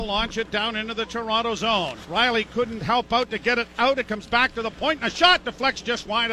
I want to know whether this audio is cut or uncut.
cut